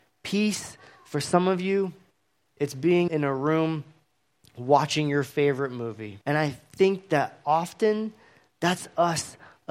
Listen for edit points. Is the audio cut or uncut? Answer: cut